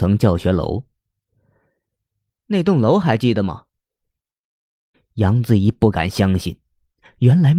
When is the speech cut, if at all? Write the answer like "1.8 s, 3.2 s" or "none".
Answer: 4.9 s